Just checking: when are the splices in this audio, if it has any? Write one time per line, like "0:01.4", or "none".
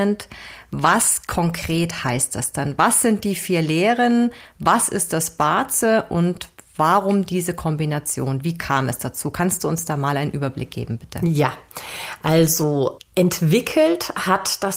none